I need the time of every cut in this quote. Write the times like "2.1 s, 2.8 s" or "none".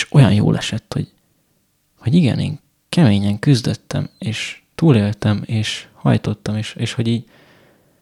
none